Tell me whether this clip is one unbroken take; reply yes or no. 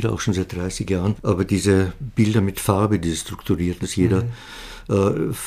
no